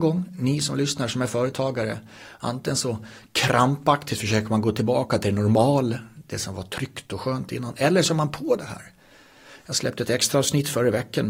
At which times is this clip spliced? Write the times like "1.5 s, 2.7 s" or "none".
none